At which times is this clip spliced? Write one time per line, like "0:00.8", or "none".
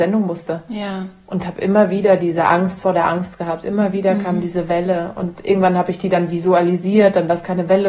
none